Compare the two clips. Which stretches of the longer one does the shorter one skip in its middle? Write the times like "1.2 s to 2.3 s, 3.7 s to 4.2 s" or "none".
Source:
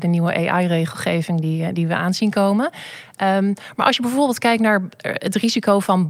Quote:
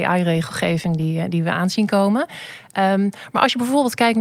none

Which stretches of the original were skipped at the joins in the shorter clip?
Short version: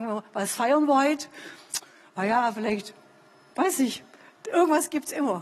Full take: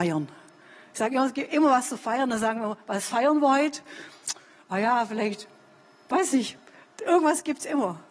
none

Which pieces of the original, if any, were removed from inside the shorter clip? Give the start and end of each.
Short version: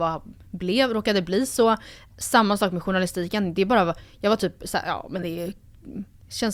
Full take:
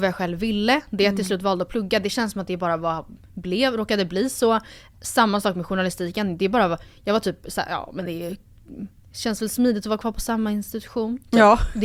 none

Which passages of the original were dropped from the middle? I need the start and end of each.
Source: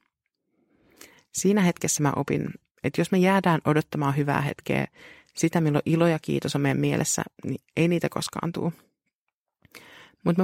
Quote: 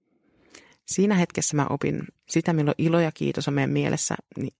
2.7 s to 5.3 s

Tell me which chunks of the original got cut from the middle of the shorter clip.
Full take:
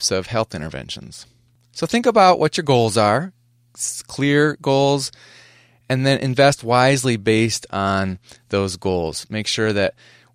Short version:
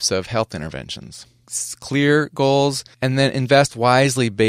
1.4 s to 3.7 s, 5.2 s to 5.8 s

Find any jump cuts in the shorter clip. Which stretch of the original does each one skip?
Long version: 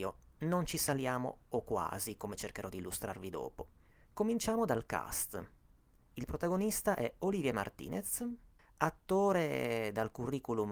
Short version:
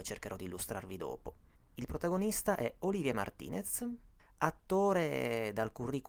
3.9 s to 5.9 s

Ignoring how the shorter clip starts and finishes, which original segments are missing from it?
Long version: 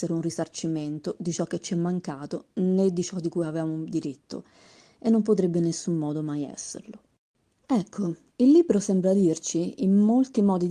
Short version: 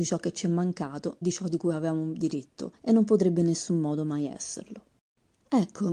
2.5 s to 2.9 s, 4.5 s to 4.9 s

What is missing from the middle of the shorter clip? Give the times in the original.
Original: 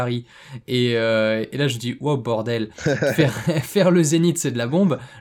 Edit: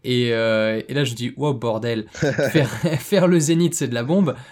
none

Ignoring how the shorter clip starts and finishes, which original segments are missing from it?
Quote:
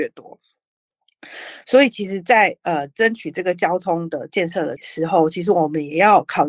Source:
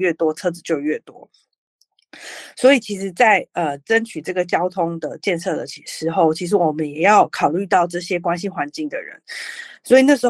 5.7 s to 5.8 s

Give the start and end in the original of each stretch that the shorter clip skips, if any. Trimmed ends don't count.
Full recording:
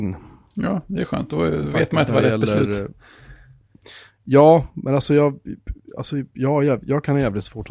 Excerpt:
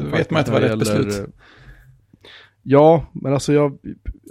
none

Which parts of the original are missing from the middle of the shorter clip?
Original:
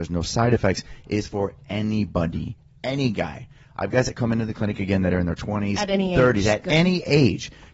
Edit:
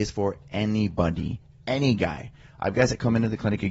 none

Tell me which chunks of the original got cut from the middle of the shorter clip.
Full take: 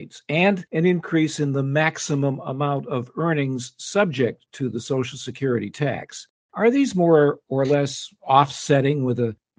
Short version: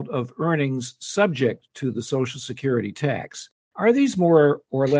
none

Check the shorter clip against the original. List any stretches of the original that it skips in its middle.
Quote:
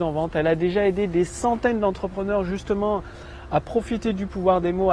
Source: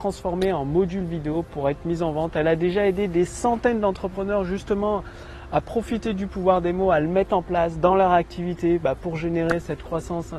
none

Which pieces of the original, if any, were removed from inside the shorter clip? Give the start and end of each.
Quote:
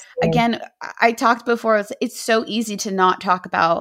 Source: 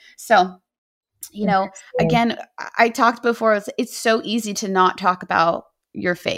none

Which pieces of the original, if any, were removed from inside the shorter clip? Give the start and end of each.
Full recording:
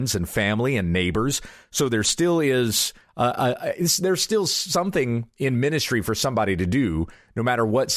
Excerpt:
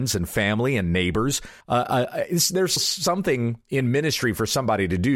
1.6 s to 3.1 s, 4.2 s to 4.4 s

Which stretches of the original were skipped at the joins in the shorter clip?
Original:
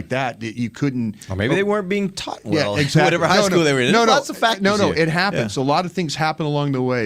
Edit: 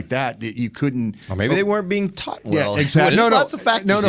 3.1 s to 3.9 s

